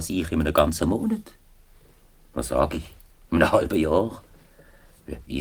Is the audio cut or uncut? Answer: uncut